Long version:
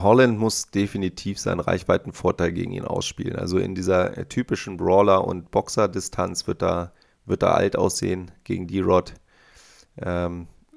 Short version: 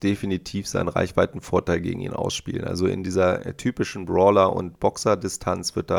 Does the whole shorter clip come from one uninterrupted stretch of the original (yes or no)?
yes